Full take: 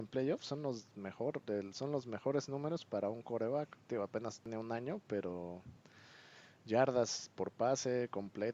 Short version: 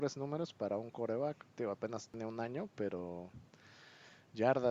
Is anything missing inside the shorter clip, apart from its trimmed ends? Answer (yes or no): no